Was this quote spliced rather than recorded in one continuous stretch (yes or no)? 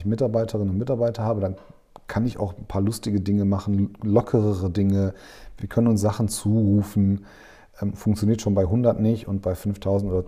no